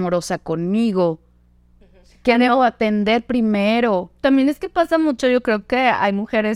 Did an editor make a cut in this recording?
no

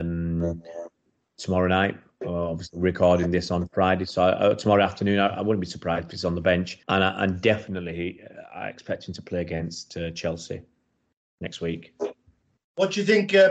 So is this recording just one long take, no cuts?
no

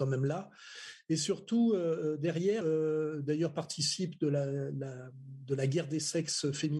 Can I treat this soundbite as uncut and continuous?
no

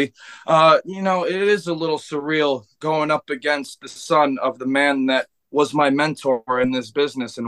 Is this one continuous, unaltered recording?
yes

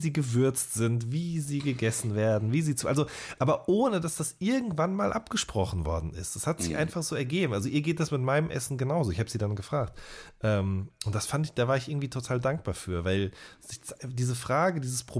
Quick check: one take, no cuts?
yes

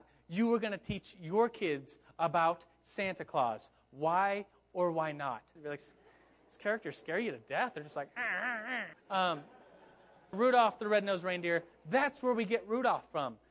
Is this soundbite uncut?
no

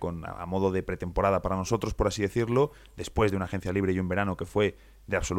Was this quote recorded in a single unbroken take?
yes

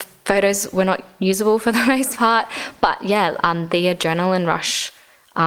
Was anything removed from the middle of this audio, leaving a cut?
no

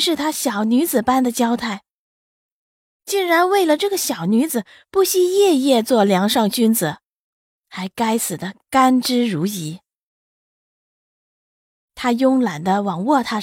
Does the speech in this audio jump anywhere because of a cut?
yes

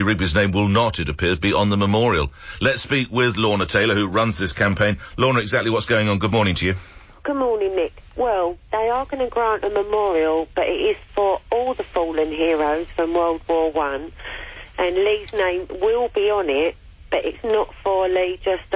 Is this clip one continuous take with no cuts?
yes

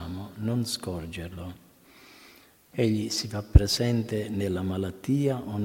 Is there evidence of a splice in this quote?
no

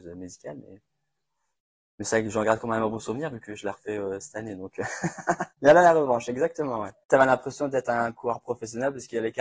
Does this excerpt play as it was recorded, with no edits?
yes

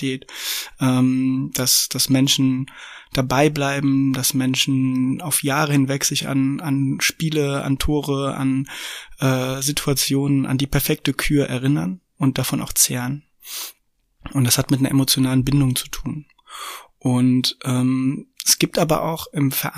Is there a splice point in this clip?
no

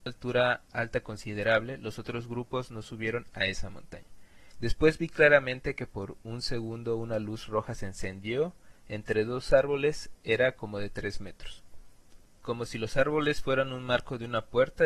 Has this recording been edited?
yes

